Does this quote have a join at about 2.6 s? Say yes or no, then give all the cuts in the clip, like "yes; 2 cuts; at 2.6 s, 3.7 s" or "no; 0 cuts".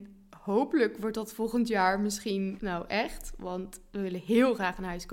yes; 1 cut; at 2.6 s